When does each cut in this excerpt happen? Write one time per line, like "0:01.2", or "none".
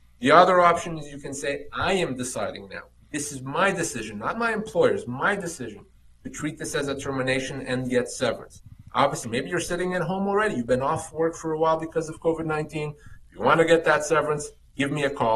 0:09.2
0:13.2